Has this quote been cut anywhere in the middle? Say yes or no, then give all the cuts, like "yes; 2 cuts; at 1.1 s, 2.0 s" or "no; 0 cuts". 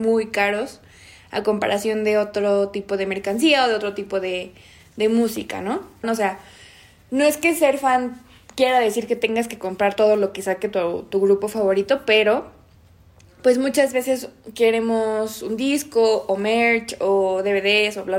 yes; 1 cut; at 6.0 s